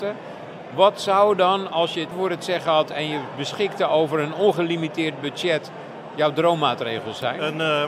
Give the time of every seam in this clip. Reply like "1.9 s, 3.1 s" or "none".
2.1 s